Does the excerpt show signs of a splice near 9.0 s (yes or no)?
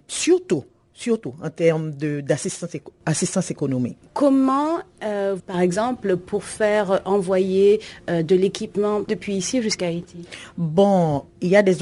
yes